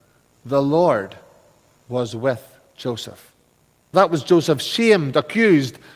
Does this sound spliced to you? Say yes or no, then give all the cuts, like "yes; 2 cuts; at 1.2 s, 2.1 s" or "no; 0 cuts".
yes; 1 cut; at 3.9 s